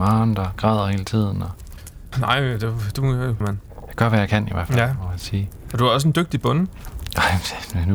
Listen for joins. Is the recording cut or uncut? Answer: cut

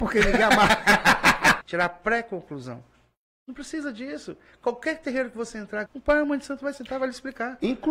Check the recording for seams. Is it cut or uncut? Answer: cut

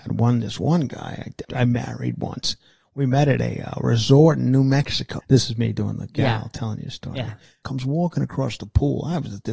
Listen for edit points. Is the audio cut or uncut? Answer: cut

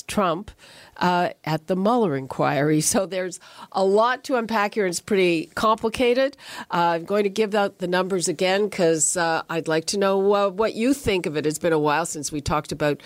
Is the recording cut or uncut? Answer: uncut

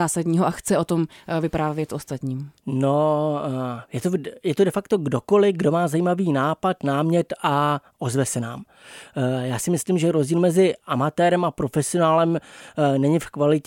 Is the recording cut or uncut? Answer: cut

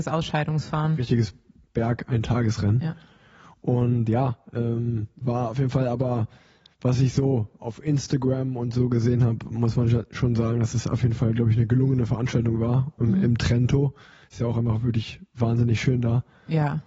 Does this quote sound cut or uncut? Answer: cut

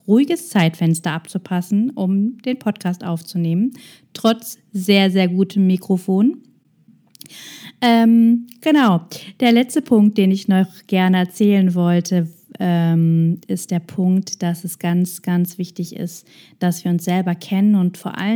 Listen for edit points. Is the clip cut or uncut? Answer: uncut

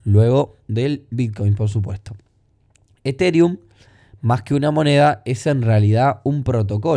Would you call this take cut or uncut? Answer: uncut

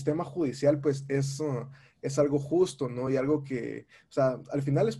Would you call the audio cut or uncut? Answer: uncut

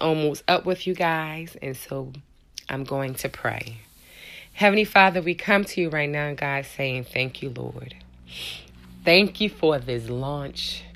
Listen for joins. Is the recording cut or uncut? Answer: uncut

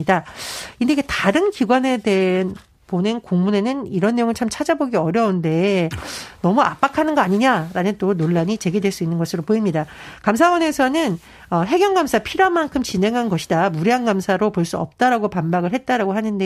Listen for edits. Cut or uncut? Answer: uncut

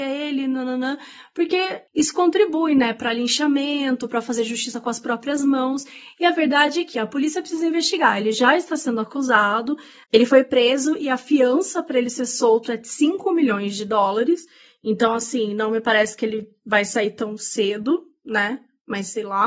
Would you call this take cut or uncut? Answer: uncut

